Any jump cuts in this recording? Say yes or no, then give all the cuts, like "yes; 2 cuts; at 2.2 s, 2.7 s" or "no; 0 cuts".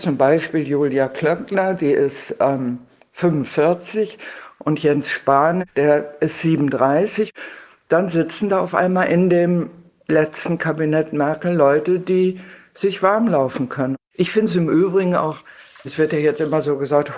yes; 1 cut; at 15.8 s